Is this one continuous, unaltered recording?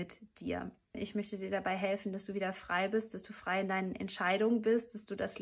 no; 1 cut; at 0.9 s

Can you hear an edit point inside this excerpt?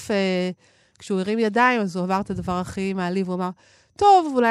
no; 0 cuts

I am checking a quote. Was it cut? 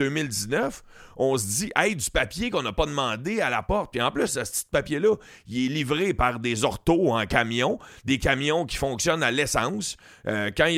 no; 0 cuts

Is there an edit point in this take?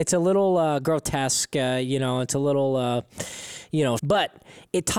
yes; 1 cut; at 4.0 s

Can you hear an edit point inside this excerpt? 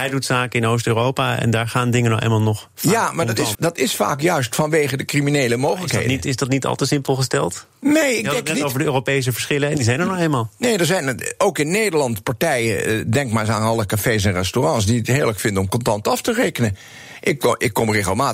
yes; 1 cut; at 3.5 s

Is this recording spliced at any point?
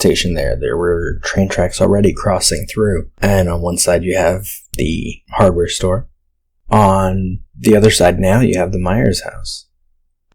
no; 0 cuts

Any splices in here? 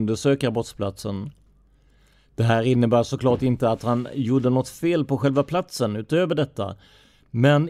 no; 0 cuts

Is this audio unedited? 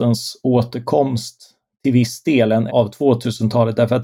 no; 1 cut; at 2.7 s

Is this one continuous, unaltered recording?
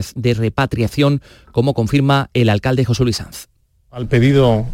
no; 1 cut; at 3.8 s

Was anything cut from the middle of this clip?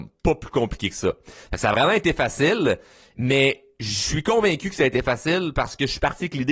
no; 0 cuts

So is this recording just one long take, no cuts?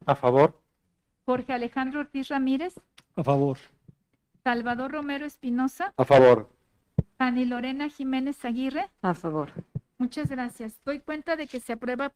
yes; 0 cuts

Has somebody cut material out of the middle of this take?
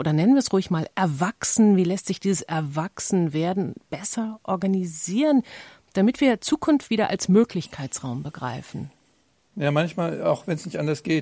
yes; 1 cut; at 6.9 s

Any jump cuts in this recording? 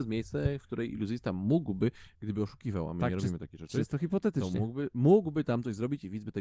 no; 0 cuts

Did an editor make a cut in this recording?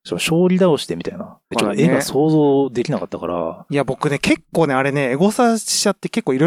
yes; 1 cut; at 1.5 s

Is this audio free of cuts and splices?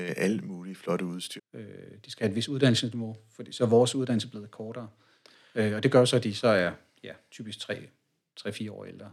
no; 1 cut; at 1.4 s

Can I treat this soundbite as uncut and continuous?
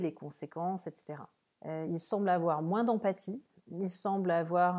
no; 1 cut; at 1.5 s

